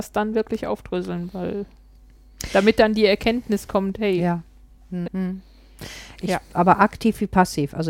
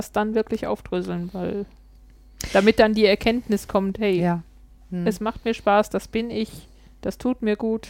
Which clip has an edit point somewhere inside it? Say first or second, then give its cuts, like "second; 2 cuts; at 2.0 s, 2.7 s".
first; 2 cuts; at 5.0 s, 6.2 s